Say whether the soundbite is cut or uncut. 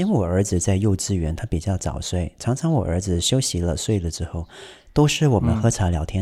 uncut